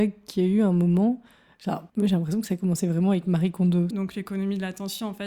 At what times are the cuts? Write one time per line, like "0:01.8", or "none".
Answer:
0:01.9
0:03.9